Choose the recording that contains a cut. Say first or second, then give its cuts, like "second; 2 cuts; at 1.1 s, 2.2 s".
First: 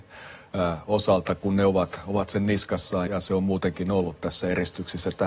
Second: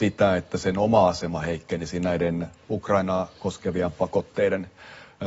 first; 1 cut; at 3.1 s